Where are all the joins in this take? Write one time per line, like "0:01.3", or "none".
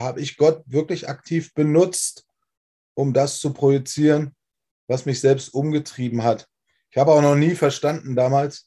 none